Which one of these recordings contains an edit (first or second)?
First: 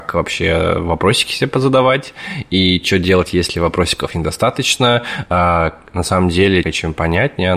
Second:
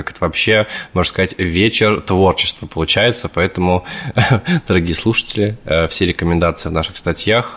first